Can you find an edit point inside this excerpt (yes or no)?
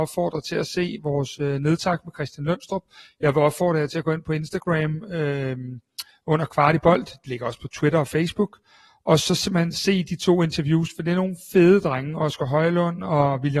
no